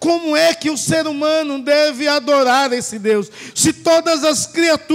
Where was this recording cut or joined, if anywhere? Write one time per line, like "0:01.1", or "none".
none